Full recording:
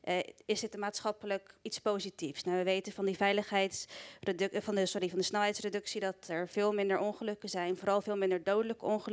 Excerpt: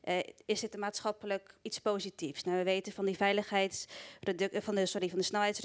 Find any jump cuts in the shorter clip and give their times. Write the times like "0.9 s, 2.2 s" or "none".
none